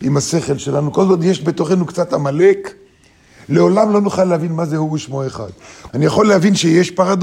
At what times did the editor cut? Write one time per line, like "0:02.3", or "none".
0:05.9